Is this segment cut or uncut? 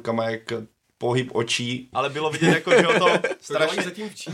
cut